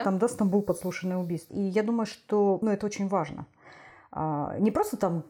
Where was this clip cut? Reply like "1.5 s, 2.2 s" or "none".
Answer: 1.5 s, 2.6 s